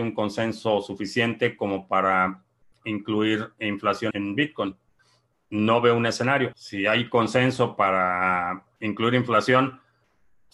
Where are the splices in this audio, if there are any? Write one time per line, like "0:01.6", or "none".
0:04.1
0:06.5